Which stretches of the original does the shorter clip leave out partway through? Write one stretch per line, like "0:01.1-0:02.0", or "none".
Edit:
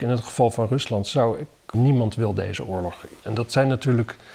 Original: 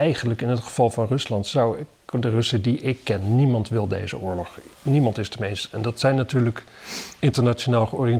0:02.1-0:03.3
0:04.8-0:05.7